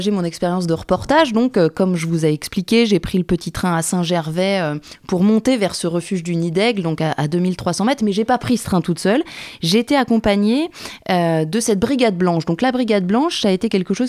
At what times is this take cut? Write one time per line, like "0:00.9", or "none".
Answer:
none